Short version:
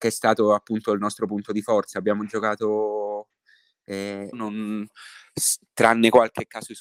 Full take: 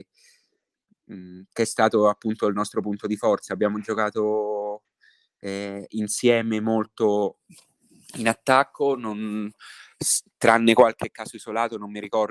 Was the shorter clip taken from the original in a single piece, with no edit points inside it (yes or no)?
no